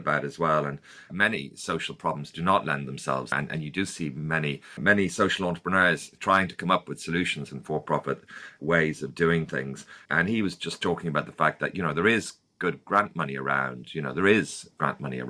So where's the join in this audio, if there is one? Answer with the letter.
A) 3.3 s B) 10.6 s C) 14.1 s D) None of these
A